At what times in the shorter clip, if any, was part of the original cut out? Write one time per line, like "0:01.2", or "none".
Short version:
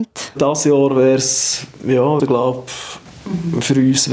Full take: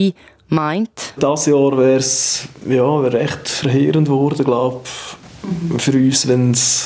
0:02.2